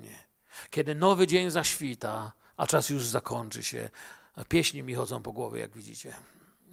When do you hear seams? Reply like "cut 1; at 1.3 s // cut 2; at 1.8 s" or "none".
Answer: none